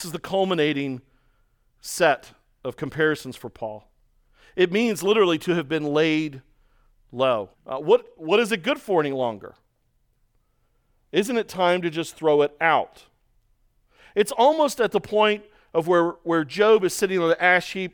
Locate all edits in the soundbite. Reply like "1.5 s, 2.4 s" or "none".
7.5 s